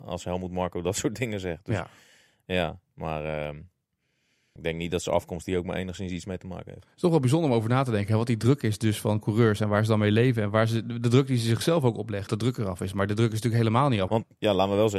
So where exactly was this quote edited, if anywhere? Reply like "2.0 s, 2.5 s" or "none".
4.6 s, 12.3 s, 14.1 s